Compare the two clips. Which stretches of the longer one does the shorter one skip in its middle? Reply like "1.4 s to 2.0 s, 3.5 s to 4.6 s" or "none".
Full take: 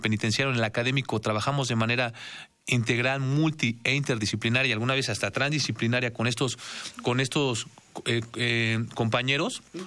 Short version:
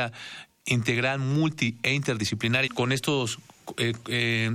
4.7 s to 6.9 s